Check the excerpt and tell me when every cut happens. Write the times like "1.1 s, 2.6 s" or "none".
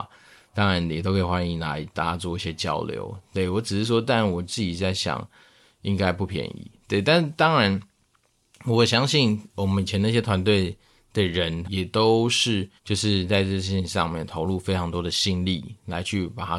11.6 s, 12.8 s